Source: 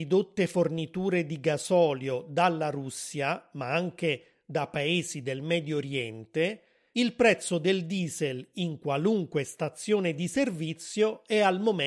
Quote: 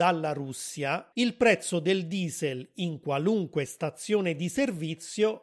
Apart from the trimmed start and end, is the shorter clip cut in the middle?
yes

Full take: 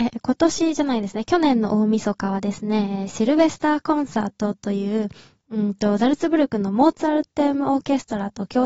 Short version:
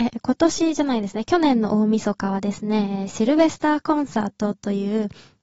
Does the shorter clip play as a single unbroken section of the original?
yes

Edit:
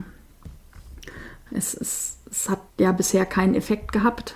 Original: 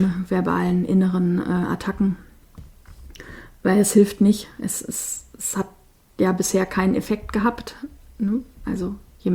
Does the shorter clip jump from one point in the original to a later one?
yes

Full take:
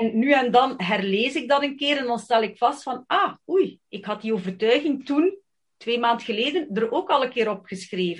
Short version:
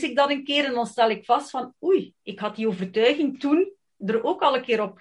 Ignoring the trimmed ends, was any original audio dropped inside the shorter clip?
yes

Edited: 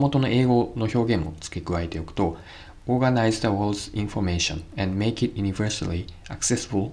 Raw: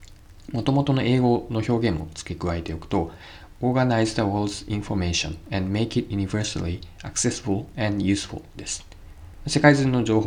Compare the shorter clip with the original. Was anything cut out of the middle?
no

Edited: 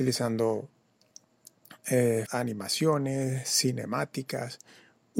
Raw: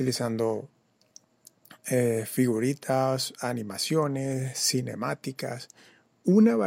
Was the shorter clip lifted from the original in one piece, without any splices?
no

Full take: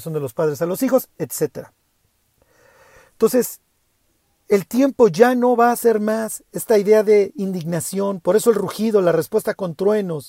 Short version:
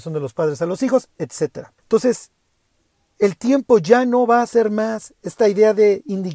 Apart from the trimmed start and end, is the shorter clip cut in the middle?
yes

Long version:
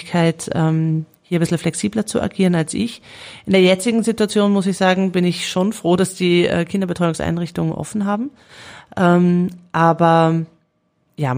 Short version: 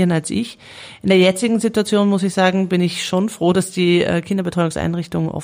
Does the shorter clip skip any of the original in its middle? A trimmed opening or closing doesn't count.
no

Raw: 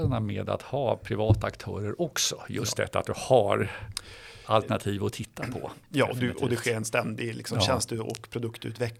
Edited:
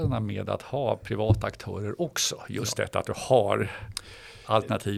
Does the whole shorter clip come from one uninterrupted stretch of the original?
yes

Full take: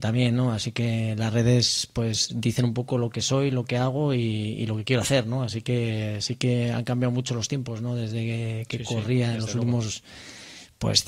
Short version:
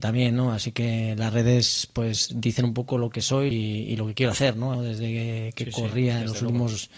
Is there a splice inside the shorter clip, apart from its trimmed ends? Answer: yes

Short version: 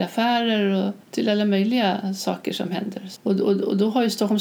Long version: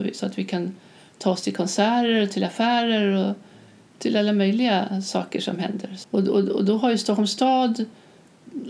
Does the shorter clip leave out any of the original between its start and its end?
yes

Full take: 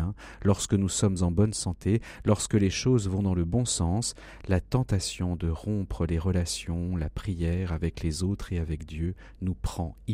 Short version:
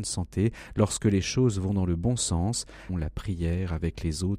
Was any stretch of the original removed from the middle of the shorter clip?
yes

